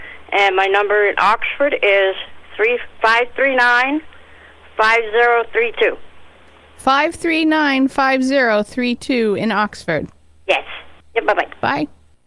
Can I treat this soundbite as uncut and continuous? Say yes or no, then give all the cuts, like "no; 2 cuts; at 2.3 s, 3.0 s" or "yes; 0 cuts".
no; 2 cuts; at 3.0 s, 11.0 s